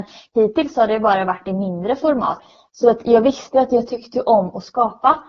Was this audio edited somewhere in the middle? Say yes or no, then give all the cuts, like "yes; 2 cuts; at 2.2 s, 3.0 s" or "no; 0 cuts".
no; 0 cuts